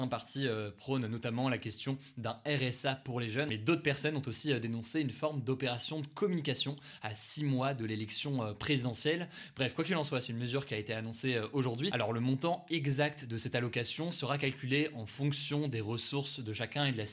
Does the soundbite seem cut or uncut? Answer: cut